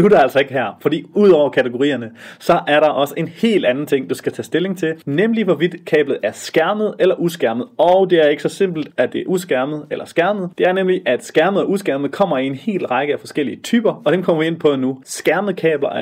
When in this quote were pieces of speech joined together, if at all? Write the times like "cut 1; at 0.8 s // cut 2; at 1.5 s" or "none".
cut 1; at 8.9 s